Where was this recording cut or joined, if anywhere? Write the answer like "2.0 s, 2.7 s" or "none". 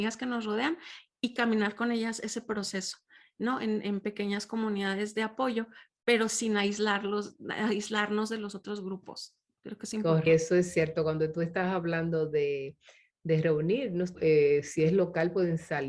10.3 s, 14.1 s